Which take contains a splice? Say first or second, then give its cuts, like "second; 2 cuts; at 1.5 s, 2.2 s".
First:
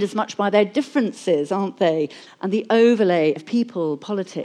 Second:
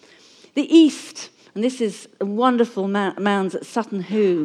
first; 2 cuts; at 2.3 s, 3.4 s